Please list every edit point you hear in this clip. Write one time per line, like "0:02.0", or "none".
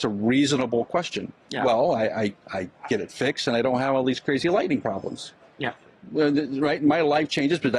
0:01.4